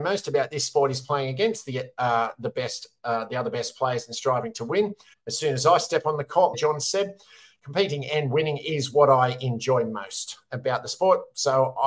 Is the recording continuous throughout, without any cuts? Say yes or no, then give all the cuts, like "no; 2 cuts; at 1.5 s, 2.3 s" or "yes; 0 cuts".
no; 2 cuts; at 5.1 s, 6.5 s